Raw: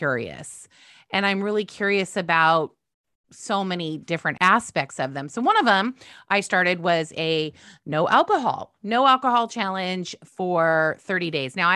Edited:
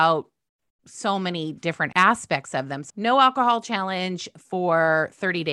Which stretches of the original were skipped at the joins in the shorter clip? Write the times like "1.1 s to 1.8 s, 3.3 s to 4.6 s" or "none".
5.3 s to 8.8 s